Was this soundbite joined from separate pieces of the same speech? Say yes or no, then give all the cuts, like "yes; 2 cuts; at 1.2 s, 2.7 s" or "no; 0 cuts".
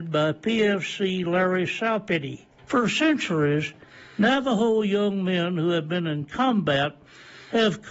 yes; 1 cut; at 2.6 s